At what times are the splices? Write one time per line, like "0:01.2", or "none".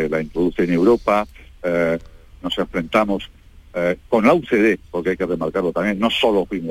none